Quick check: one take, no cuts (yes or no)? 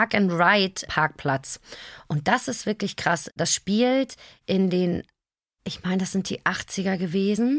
yes